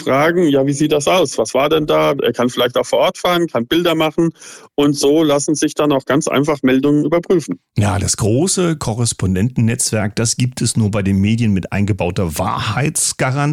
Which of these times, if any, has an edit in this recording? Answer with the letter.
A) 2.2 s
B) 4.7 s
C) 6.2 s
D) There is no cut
A